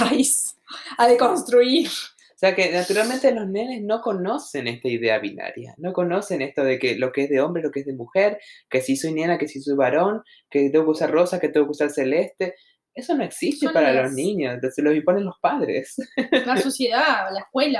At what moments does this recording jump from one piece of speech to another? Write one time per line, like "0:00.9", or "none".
none